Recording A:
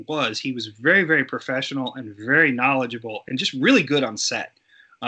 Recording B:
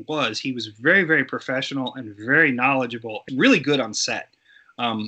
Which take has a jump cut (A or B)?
B